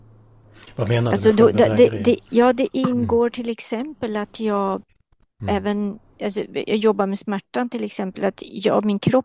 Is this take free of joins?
yes; 0 cuts

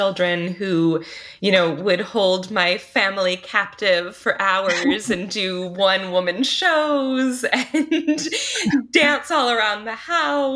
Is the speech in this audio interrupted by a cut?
no; 0 cuts

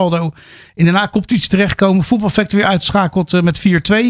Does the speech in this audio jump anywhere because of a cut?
no; 0 cuts

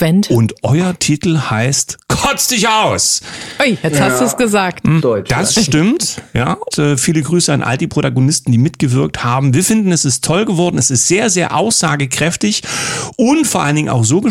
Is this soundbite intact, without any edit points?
no; 2 cuts; at 5.0 s, 6.7 s

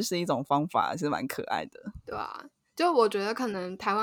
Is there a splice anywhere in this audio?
no; 0 cuts

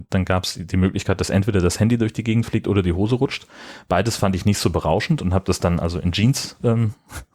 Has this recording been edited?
no; 0 cuts

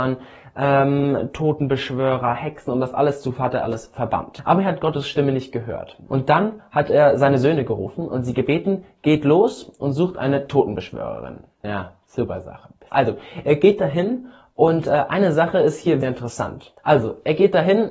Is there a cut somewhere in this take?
yes; 3 cuts; at 6.1 s, 12.9 s, 16.0 s

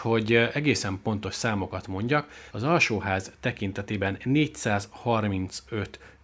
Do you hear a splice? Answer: yes; 1 cut; at 2.5 s

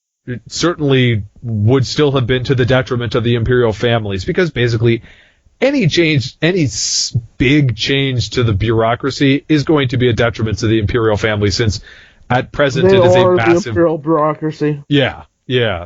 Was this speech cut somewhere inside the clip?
no; 0 cuts

